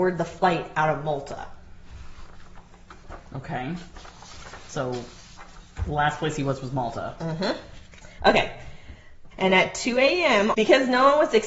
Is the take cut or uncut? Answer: cut